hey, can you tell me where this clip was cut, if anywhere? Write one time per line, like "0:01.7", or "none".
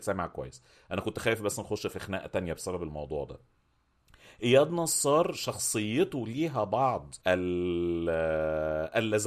0:07.2